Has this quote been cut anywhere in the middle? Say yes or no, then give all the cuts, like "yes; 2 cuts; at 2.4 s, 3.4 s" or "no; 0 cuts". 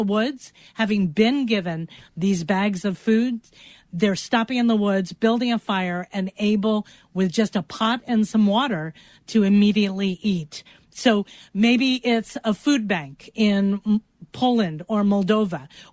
no; 0 cuts